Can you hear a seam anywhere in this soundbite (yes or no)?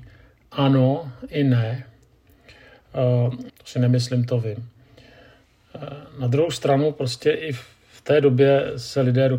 yes